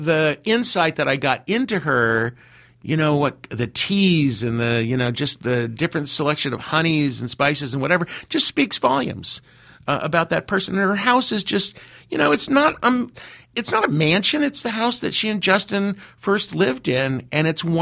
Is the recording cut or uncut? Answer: uncut